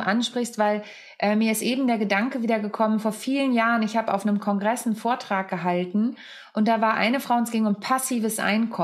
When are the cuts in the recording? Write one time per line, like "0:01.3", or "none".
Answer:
none

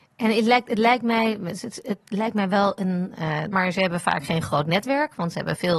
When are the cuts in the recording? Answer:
0:03.5

